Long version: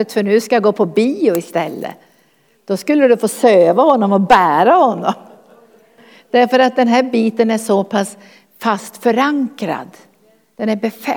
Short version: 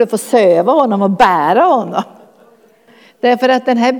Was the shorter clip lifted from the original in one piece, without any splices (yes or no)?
yes